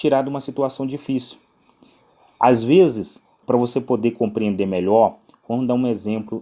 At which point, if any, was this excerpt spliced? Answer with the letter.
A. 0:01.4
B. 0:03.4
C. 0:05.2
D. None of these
B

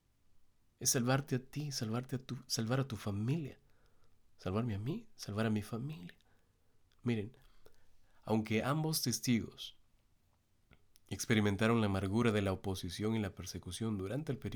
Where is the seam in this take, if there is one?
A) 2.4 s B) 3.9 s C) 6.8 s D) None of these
C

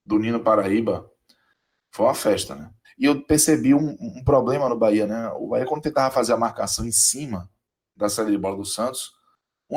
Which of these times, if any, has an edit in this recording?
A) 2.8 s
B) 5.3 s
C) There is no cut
A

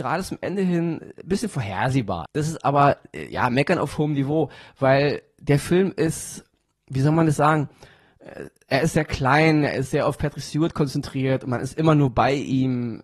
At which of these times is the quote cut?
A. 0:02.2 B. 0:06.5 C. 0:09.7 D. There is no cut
A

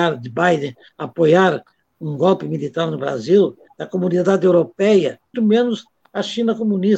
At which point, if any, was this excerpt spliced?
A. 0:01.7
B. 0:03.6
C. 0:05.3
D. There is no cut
C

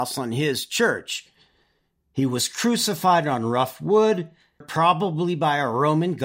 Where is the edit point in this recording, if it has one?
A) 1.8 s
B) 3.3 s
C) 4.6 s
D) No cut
C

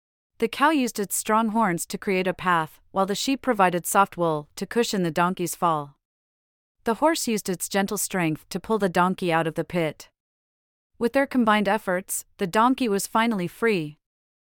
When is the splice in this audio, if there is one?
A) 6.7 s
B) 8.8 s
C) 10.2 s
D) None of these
D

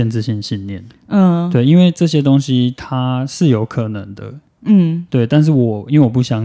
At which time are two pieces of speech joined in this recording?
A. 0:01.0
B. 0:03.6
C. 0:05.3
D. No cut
D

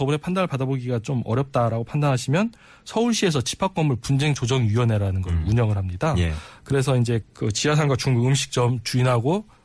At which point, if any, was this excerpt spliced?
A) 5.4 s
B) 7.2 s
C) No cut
B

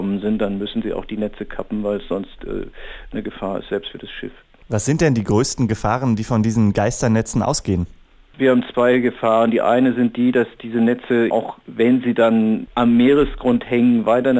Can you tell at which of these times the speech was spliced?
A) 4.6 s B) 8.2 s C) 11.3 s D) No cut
C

